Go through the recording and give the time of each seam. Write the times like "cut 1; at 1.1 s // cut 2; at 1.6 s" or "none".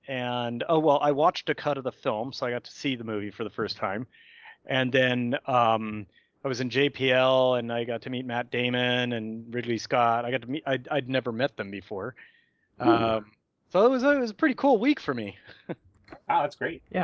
none